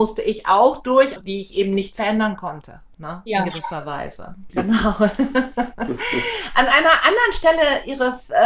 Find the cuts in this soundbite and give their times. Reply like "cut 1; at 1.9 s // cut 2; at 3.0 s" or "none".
cut 1; at 1.2 s // cut 2; at 4.5 s